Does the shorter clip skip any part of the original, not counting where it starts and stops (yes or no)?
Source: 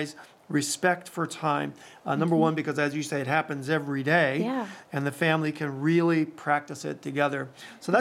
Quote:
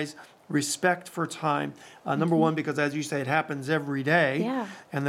no